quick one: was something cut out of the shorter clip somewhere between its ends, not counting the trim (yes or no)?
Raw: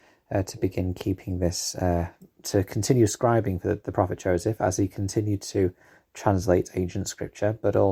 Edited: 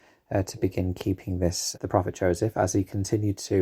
yes